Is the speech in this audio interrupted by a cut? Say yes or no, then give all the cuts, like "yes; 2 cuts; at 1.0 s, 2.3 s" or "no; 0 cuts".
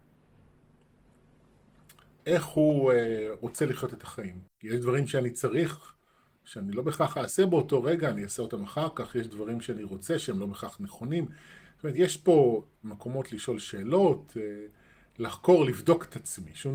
yes; 1 cut; at 4.5 s